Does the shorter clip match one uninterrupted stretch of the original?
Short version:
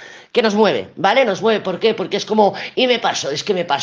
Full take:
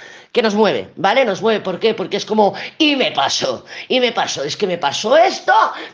no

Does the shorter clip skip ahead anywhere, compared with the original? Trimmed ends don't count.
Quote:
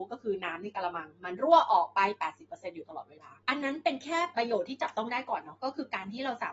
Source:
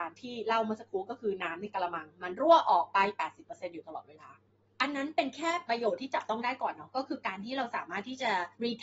yes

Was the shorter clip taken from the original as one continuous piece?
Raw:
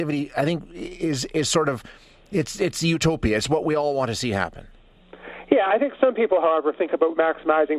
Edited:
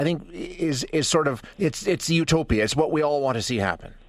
no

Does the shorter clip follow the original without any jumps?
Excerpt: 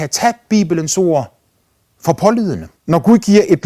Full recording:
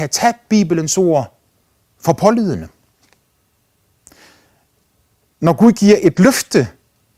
no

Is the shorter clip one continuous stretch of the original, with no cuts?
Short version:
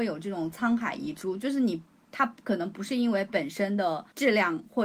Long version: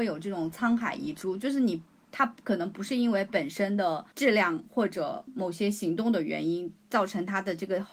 yes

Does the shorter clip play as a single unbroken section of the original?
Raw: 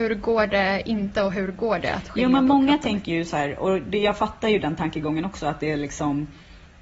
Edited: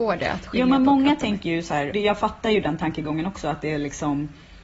no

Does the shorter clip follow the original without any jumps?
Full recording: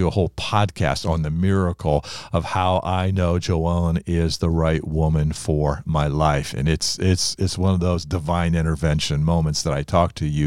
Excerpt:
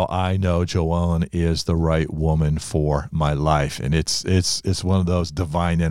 yes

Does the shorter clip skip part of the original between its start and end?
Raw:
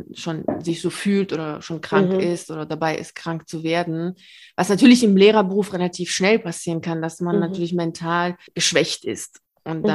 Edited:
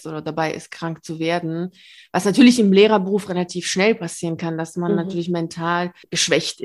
no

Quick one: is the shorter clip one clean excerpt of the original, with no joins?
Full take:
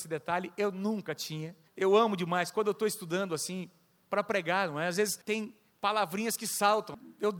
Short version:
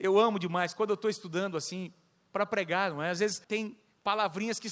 yes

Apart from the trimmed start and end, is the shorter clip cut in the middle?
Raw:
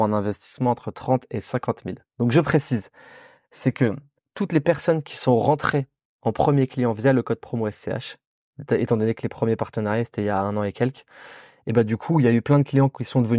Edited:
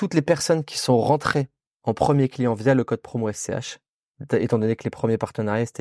no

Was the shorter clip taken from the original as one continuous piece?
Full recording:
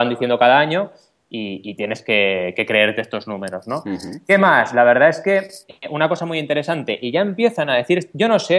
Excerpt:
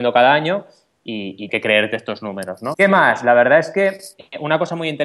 no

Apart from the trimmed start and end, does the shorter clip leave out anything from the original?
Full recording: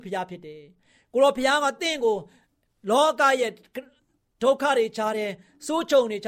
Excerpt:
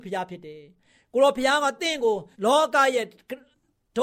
yes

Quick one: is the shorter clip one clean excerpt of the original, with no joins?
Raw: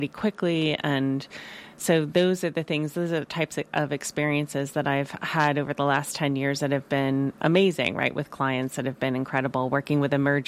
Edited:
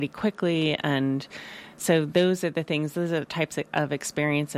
yes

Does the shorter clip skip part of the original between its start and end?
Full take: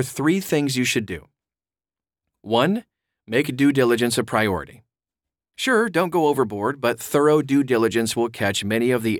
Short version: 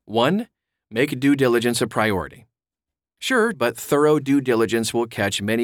yes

